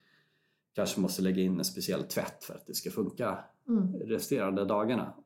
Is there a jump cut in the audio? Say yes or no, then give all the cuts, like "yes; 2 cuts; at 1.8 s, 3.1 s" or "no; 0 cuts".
no; 0 cuts